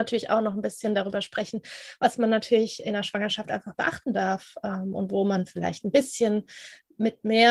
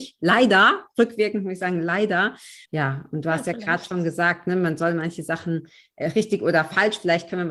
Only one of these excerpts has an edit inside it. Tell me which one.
second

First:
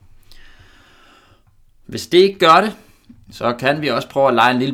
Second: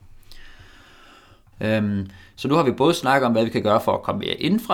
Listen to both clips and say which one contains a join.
second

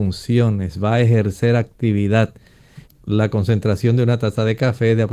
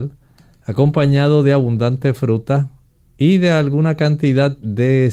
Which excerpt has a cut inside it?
first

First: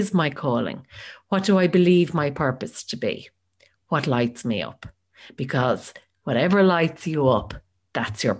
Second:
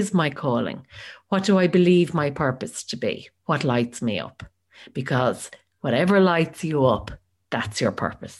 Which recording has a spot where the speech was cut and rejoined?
second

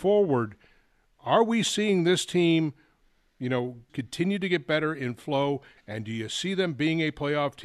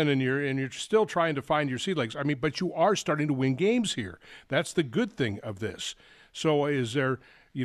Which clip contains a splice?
first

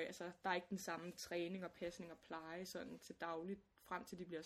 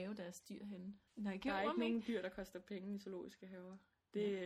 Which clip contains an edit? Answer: second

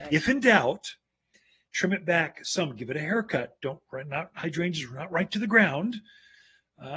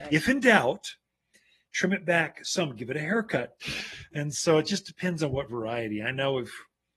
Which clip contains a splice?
second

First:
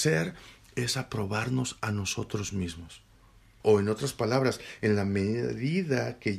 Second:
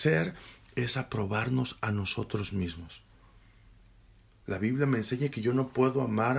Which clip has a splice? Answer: first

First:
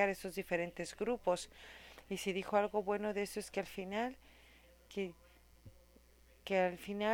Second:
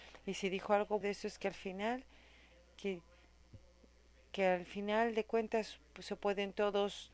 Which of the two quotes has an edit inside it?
second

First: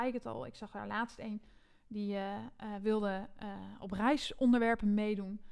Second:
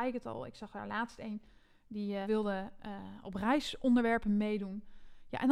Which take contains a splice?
second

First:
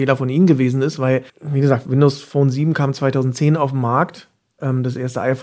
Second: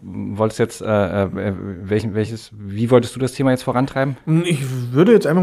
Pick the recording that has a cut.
first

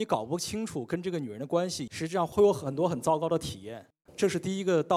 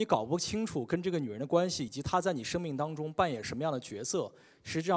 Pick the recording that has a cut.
first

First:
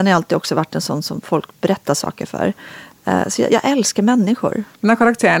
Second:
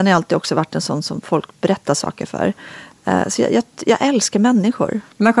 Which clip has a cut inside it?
first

